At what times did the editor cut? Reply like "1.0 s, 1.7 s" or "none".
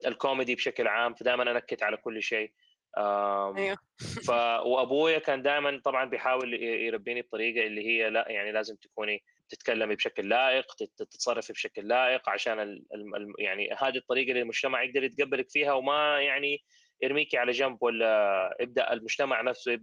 none